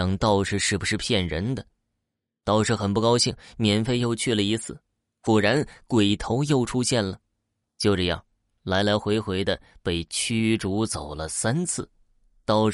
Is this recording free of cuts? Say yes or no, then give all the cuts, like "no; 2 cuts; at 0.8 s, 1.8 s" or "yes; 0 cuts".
no; 1 cut; at 7.6 s